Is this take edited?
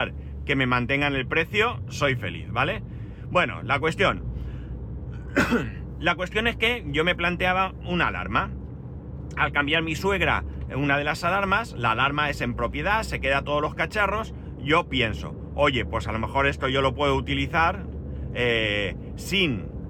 no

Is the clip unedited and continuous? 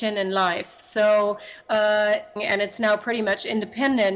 no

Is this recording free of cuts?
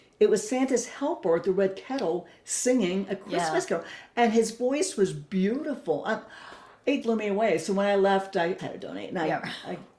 no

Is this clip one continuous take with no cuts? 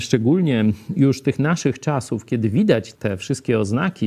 no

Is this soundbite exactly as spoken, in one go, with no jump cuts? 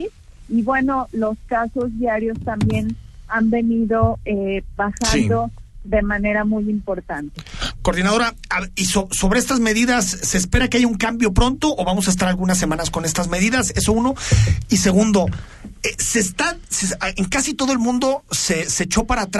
yes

